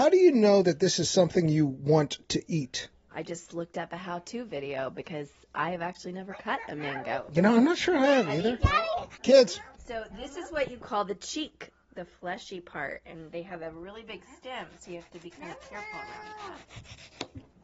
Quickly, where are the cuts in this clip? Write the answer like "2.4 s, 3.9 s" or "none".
3.1 s

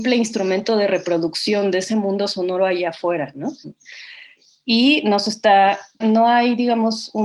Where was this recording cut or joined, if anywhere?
3.6 s, 6.0 s

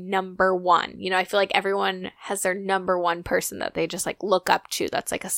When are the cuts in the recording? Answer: none

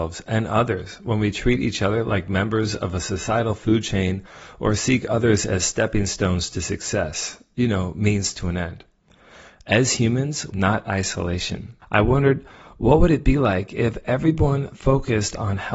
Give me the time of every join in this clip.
10.5 s, 11.8 s

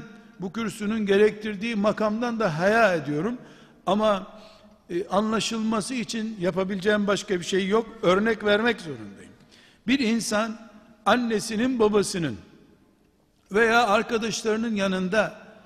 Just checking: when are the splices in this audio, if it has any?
none

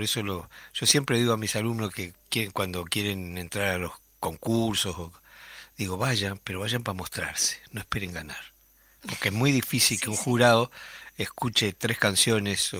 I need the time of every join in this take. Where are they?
none

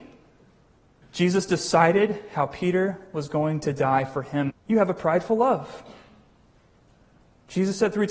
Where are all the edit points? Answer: 1.0 s, 4.5 s

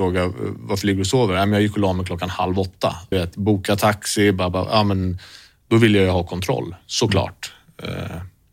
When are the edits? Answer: 3.1 s

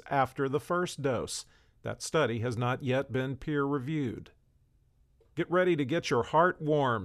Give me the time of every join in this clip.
none

